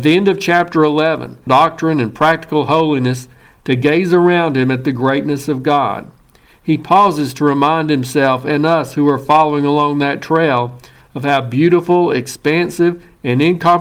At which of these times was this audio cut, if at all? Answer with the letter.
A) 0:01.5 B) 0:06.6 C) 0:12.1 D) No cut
A